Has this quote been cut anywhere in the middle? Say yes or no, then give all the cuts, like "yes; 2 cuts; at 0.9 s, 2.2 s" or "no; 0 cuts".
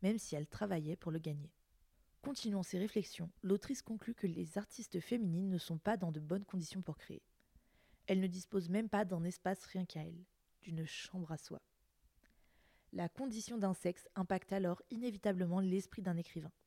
no; 0 cuts